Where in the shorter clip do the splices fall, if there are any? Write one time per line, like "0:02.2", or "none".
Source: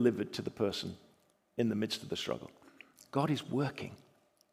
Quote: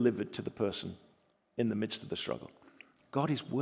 none